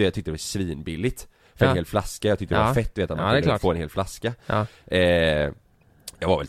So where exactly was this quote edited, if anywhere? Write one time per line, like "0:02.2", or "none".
none